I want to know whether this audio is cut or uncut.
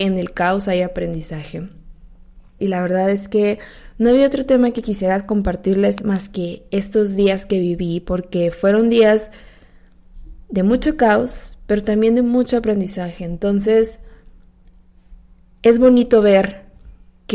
cut